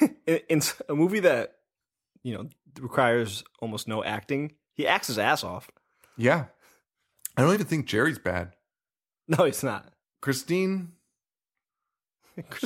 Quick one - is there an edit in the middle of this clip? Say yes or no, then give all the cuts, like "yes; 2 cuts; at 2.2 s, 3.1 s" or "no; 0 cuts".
no; 0 cuts